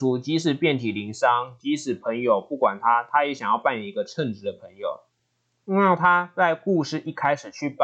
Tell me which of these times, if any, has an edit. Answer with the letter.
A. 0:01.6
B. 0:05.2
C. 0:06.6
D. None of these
D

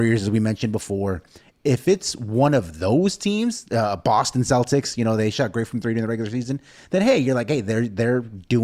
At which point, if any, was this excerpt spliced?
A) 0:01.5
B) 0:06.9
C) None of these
C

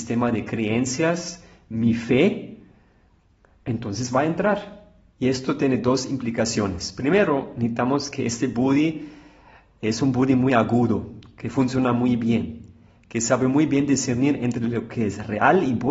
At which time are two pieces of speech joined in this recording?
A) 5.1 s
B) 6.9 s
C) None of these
A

